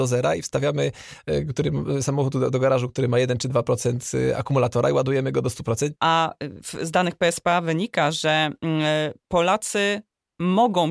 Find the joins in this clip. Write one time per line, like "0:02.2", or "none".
0:05.9